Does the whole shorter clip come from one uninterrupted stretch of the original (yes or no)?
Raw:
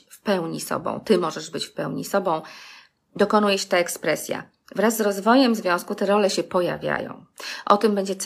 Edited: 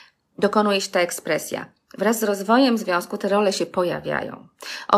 yes